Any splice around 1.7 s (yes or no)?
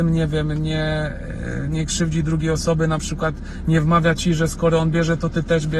yes